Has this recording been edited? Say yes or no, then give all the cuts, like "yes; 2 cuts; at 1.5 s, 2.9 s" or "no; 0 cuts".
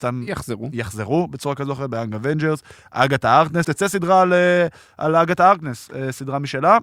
yes; 1 cut; at 3.6 s